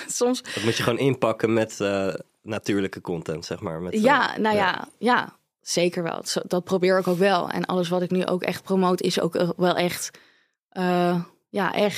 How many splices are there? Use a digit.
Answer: 0